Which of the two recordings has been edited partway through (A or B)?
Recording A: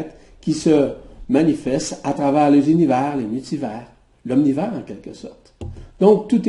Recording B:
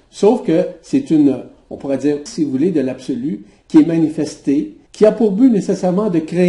B